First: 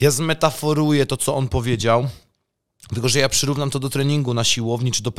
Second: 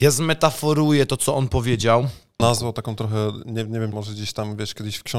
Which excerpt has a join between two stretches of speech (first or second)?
second